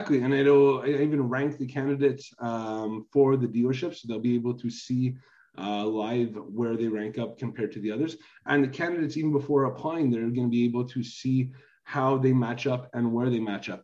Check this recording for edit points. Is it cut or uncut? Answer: uncut